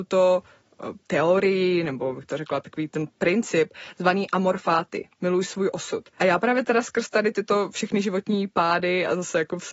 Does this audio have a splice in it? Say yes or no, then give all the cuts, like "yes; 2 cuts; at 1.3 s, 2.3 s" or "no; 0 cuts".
yes; 2 cuts; at 1.0 s, 6.2 s